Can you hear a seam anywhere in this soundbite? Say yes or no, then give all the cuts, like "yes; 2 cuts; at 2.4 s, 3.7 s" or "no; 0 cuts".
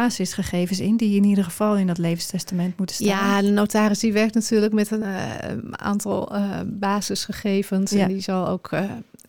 no; 0 cuts